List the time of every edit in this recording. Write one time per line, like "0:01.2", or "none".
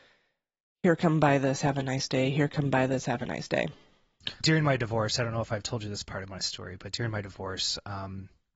0:04.4